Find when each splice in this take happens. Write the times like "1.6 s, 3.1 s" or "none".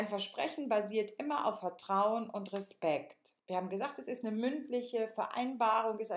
3.4 s